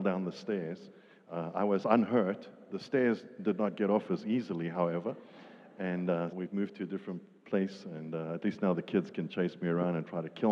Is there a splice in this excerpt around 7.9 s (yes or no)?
no